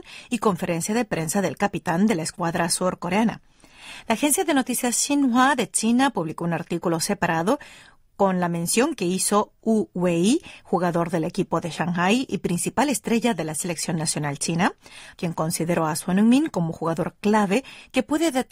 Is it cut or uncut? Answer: cut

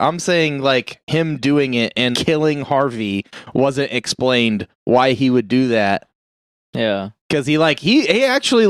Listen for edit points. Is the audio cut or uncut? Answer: cut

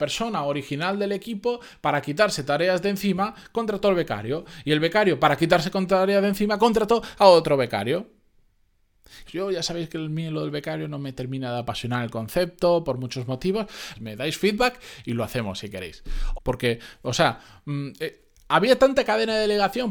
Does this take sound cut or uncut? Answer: cut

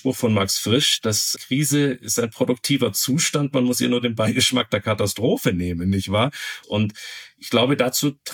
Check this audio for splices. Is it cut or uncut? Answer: cut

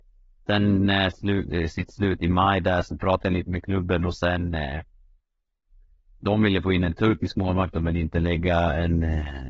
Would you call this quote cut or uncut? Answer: cut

